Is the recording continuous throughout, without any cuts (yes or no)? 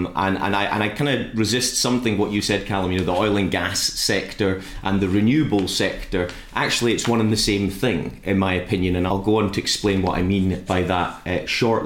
no